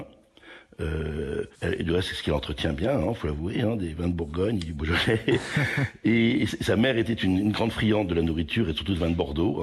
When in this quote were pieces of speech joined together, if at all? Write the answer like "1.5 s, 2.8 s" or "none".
1.5 s